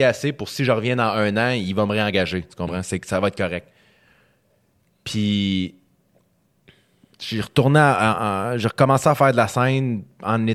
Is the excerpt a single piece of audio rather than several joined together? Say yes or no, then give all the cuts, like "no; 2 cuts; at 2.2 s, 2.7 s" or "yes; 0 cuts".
yes; 0 cuts